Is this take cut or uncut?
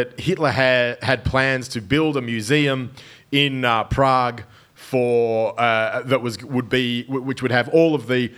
uncut